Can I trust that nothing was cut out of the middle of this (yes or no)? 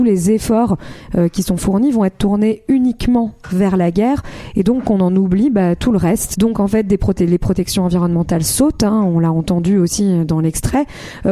no